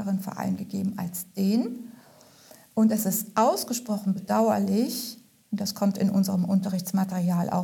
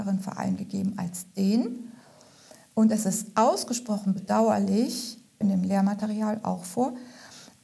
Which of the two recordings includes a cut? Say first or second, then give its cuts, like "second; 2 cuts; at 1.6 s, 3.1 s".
second; 1 cut; at 5.4 s